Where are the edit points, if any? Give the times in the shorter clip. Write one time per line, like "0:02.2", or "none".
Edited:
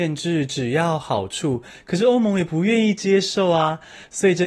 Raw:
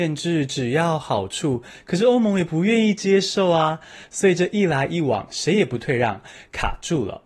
none

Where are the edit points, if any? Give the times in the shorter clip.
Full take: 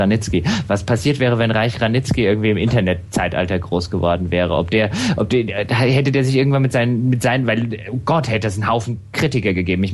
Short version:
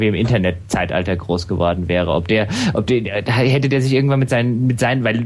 none

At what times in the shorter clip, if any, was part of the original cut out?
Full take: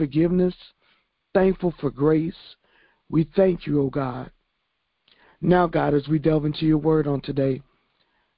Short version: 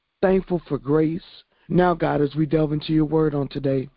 0:01.6

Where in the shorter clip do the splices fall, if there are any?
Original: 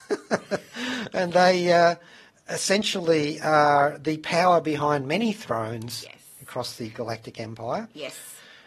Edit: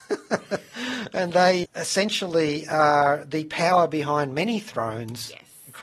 0:01.6

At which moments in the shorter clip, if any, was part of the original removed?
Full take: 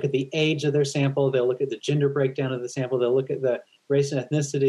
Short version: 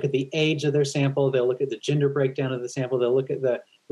none

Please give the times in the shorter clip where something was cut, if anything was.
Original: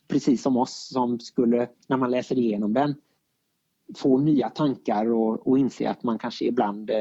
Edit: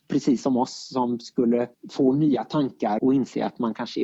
0:01.7
0:03.0

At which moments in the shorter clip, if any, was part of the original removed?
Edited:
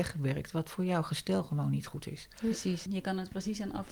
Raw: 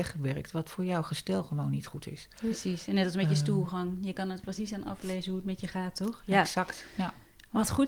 0:02.9

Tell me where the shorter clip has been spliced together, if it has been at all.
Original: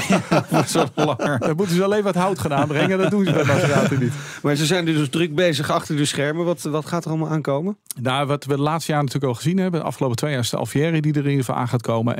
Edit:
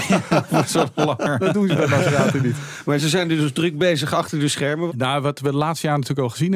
0:01.4
0:04.9

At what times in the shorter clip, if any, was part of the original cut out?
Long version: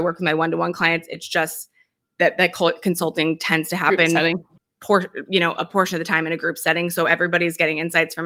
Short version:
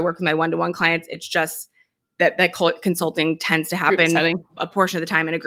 0:04.6

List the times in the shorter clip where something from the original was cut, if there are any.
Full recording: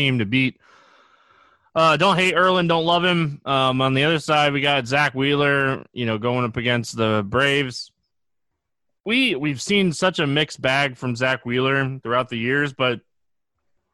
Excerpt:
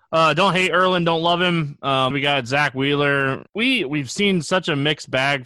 0:02.1
0:03.5

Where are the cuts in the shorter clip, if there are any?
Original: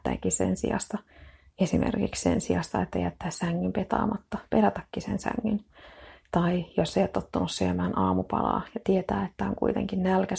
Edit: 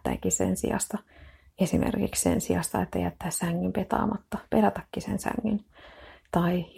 none

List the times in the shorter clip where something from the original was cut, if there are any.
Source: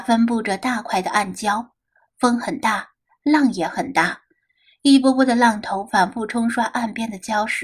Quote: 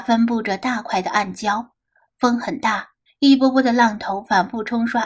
0:03.1

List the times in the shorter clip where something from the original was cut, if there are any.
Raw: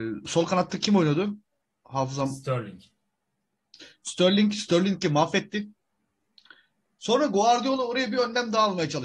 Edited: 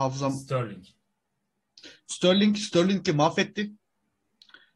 none

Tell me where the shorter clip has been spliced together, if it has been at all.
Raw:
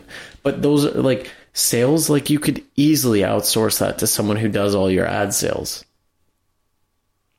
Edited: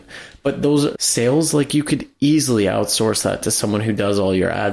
0:00.9

